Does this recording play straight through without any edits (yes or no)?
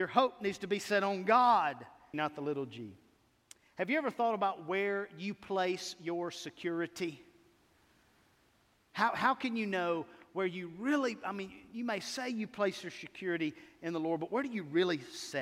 no